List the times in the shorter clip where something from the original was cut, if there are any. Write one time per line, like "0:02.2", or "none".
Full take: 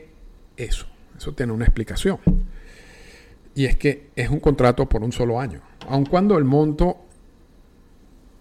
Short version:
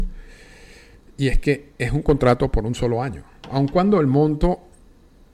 none